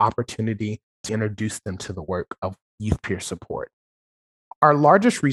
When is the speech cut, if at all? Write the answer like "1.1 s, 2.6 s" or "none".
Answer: 1.1 s, 2.7 s